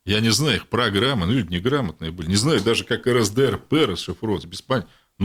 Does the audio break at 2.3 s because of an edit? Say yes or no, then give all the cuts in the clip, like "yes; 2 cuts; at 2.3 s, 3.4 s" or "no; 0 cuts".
no; 0 cuts